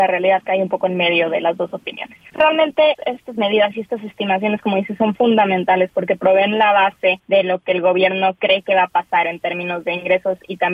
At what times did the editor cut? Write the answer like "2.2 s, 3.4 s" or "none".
2.3 s